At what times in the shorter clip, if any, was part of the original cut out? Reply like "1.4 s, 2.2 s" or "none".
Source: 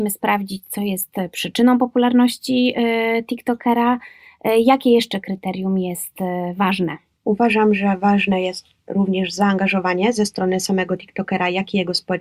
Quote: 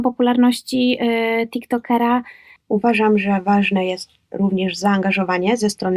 2.6 s